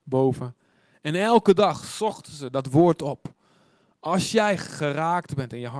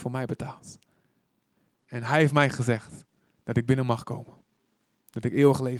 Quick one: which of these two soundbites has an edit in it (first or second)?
first